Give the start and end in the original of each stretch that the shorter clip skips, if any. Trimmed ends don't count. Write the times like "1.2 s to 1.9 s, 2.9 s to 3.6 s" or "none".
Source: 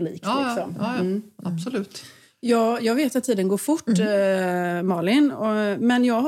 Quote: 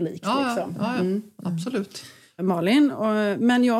2.4 s to 4.8 s